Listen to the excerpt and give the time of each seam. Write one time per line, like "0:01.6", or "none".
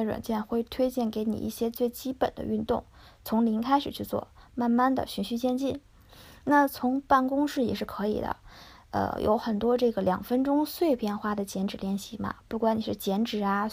none